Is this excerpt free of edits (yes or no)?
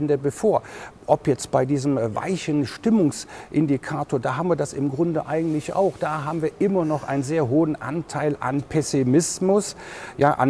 yes